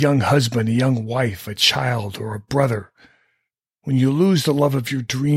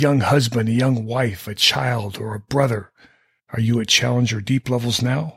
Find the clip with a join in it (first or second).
second